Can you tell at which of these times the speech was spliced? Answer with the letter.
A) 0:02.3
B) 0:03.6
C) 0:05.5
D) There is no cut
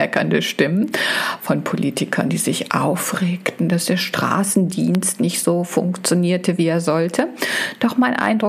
D